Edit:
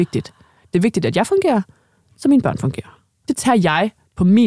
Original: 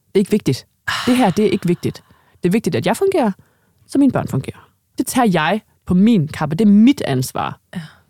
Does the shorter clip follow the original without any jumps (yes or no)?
yes